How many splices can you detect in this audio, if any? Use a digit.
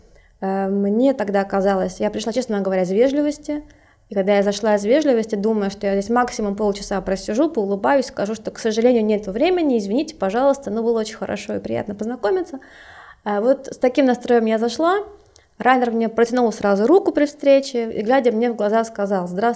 0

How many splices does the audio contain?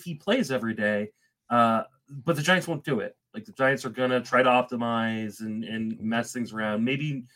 0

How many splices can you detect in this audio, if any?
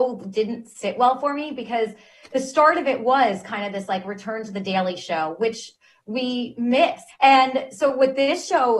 1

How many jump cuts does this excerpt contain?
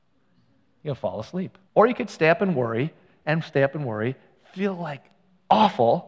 1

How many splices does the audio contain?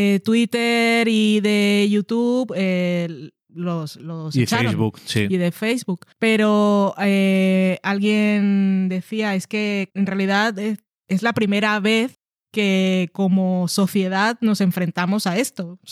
1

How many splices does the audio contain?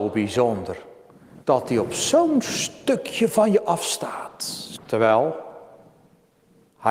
1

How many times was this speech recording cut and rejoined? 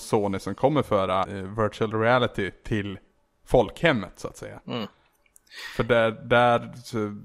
1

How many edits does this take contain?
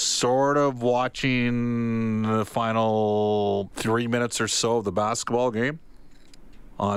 1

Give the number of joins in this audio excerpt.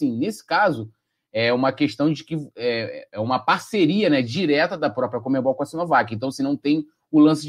0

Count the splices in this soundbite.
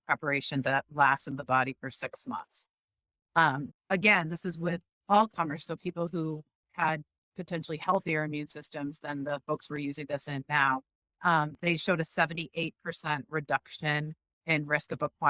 2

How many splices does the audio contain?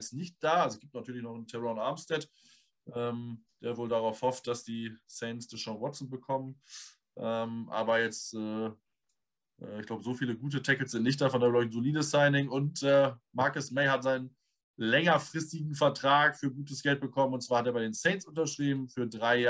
0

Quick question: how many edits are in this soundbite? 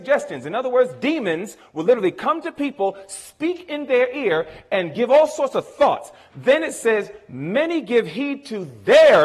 0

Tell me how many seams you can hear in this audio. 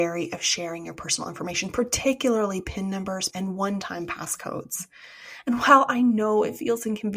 1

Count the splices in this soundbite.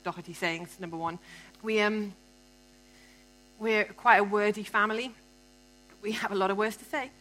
1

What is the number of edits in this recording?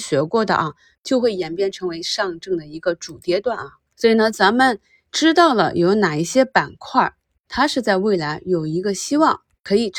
2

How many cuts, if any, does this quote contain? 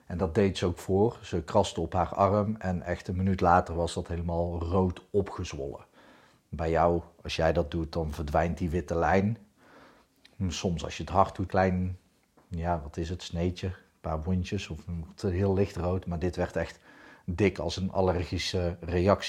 1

